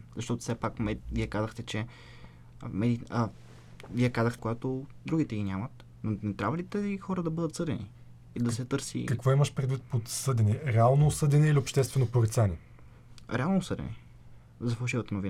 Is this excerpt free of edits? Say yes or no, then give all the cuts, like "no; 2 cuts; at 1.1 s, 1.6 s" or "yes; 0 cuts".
no; 1 cut; at 4.4 s